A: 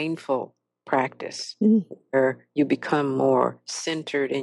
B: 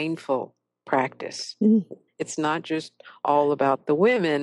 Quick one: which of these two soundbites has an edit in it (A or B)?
B